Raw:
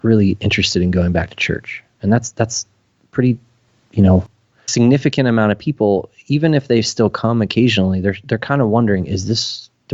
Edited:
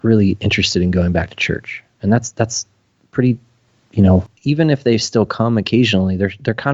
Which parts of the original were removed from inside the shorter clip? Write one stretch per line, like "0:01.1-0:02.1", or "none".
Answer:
0:04.4-0:06.2